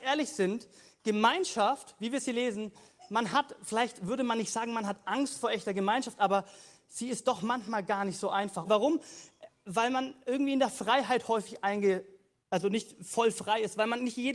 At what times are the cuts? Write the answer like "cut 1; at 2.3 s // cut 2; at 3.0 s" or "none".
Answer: cut 1; at 8.6 s